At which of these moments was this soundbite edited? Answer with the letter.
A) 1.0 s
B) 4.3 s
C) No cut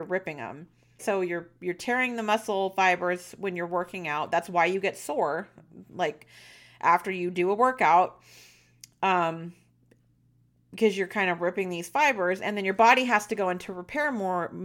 A